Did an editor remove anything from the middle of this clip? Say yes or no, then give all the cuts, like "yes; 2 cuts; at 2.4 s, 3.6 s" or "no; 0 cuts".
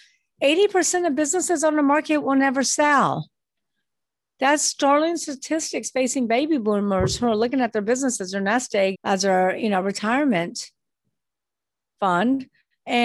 yes; 1 cut; at 8.9 s